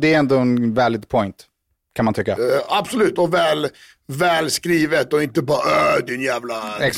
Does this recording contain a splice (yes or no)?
no